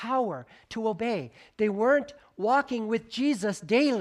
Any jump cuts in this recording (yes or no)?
no